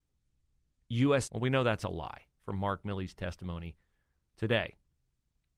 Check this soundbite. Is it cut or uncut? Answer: cut